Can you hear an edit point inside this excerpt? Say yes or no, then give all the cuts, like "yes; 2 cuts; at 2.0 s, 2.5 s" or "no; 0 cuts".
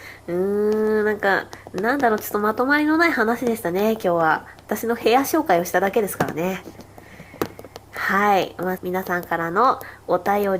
yes; 1 cut; at 8.8 s